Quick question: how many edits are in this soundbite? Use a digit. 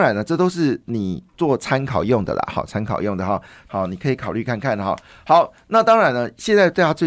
1